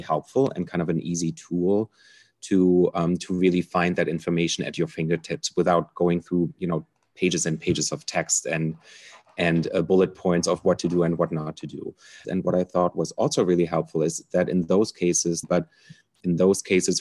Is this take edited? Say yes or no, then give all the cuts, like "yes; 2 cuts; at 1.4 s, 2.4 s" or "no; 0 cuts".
yes; 2 cuts; at 12.2 s, 15.4 s